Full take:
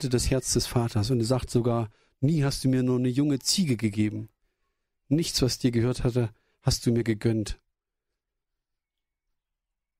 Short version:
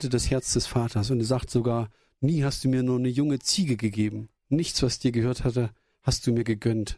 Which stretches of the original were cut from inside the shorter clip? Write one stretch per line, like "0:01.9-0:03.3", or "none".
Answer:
0:04.4-0:05.0